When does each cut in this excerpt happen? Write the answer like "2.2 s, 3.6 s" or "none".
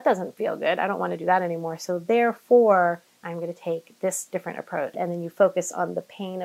3.2 s, 4.9 s